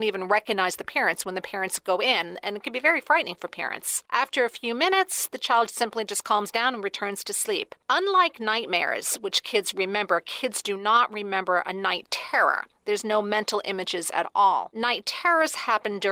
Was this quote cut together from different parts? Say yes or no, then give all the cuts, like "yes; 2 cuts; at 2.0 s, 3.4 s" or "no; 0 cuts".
no; 0 cuts